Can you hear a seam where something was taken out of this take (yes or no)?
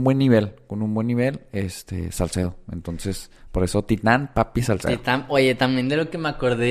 no